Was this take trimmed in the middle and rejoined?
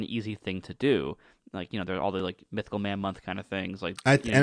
no; 0 cuts

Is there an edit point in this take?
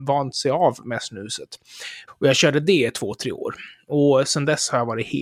yes; 1 cut; at 2.1 s

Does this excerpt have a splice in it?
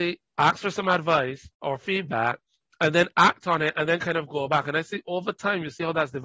no; 0 cuts

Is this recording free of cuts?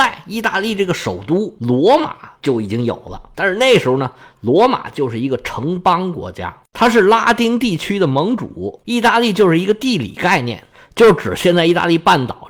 no; 1 cut; at 8.8 s

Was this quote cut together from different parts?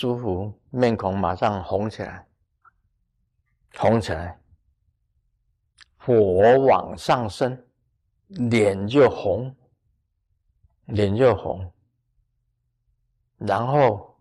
no; 0 cuts

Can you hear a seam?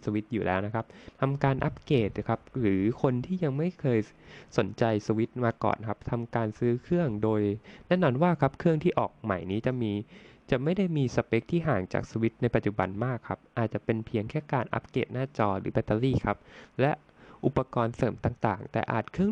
no; 0 cuts

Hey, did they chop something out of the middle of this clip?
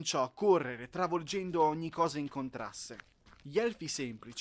no; 0 cuts

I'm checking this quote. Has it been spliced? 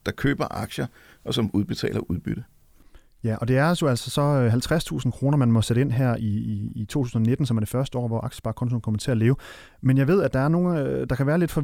no; 0 cuts

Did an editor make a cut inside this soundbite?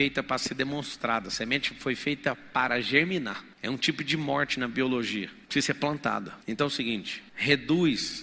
no; 0 cuts

